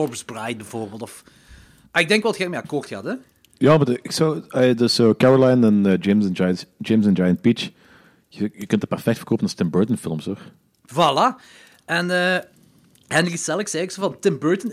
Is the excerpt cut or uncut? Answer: uncut